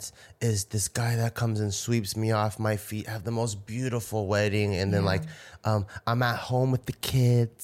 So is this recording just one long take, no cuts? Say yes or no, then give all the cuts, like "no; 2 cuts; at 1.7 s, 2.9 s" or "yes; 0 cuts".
yes; 0 cuts